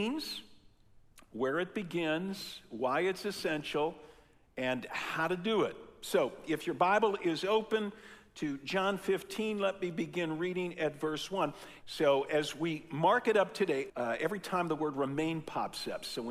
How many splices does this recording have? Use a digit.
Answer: 2